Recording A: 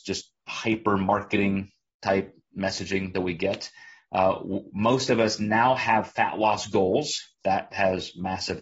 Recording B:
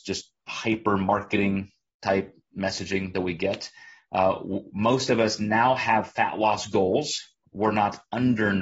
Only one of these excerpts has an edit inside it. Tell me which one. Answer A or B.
A